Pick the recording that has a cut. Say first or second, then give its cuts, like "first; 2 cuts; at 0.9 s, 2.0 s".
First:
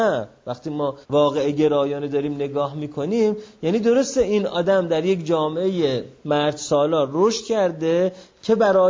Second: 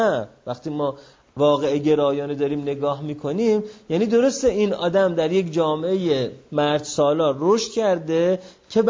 first; 1 cut; at 1.0 s